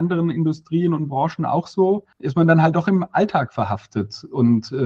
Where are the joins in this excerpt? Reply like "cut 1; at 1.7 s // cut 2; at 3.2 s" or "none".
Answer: cut 1; at 2.1 s